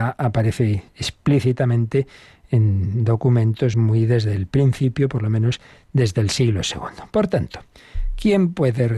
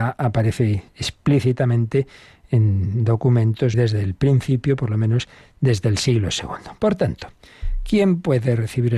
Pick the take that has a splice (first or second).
second